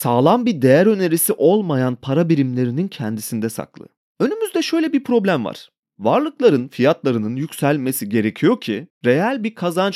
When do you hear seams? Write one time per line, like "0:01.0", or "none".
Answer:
none